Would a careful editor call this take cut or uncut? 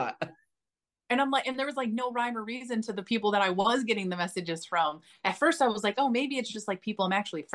uncut